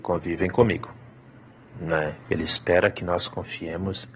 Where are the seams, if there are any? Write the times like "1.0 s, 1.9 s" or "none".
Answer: 2.2 s